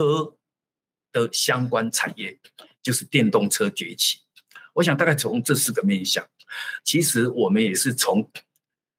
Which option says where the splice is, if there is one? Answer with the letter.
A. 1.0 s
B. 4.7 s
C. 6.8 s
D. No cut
C